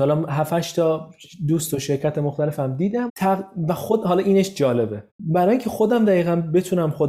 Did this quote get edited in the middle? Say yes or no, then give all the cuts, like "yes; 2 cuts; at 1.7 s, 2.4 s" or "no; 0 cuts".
yes; 2 cuts; at 3.1 s, 5.1 s